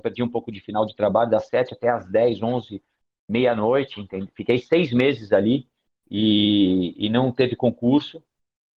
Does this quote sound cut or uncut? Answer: uncut